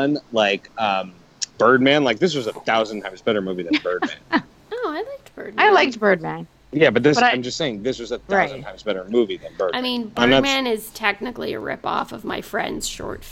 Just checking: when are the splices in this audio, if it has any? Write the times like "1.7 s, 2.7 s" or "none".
1.6 s